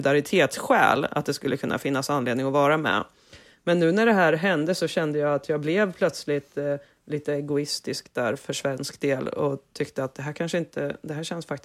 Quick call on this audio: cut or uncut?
uncut